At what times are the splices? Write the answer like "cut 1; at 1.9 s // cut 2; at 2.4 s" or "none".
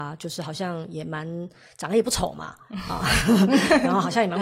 none